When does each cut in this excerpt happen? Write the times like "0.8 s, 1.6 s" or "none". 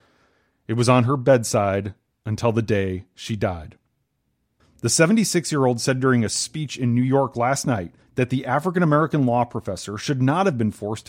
4.6 s, 8.0 s